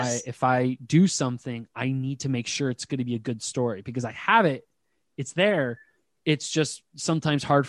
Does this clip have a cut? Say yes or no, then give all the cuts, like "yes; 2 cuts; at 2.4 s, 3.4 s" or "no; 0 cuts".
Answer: no; 0 cuts